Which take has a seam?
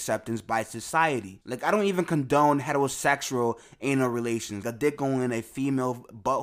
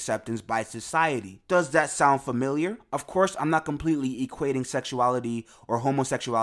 first; 2 cuts; at 1.4 s, 4.6 s

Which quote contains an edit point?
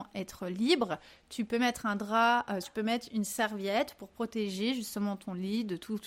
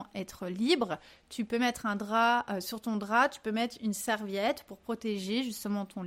first; 1 cut; at 2.6 s

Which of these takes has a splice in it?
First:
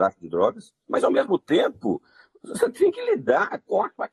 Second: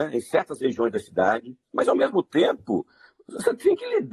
second; 1 cut; at 1.6 s

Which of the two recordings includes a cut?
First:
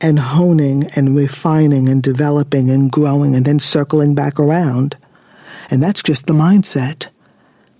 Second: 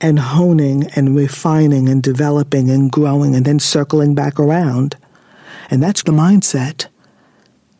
second; 1 cut; at 6.0 s

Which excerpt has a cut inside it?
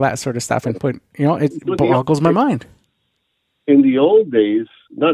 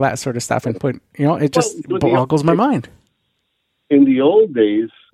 first; 1 cut; at 1.5 s

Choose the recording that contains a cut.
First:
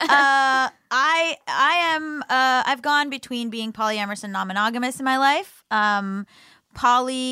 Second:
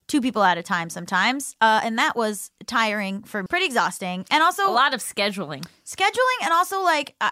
second; 1 cut; at 3.5 s

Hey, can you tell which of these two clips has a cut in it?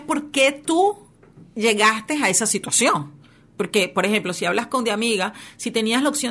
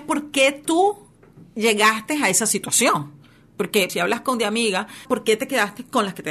second; 2 cuts; at 3.9 s, 5.0 s

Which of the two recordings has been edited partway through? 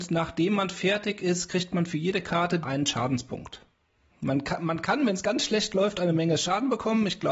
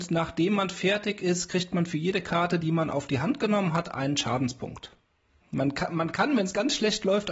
first; 1 cut; at 2.6 s

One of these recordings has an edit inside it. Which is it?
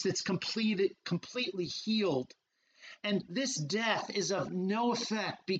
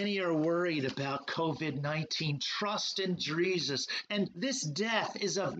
second; 1 cut; at 4.1 s

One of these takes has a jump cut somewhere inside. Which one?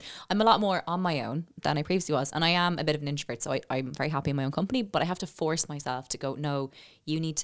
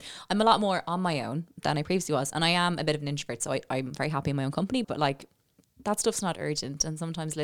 second; 1 cut; at 4.8 s

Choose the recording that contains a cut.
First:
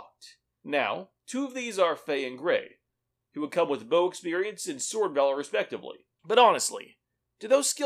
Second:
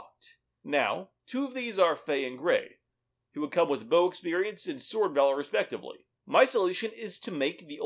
second; 1 cut; at 6.2 s

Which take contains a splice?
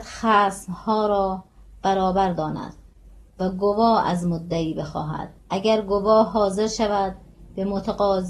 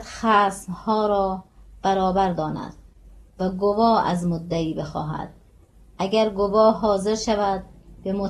first; 1 cut; at 5.4 s

